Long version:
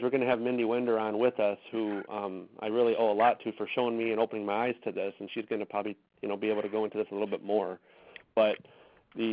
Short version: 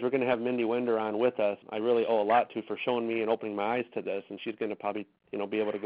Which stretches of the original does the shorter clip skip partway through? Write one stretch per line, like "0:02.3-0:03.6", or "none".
0:01.6-0:02.5